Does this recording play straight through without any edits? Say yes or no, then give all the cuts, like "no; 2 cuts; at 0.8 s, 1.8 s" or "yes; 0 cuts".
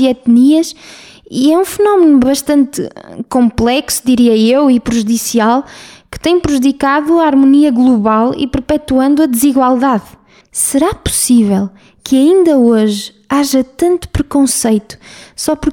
no; 1 cut; at 10.4 s